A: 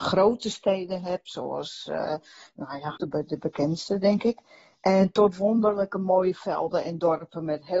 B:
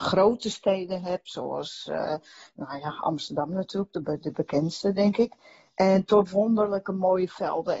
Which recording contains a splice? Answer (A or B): A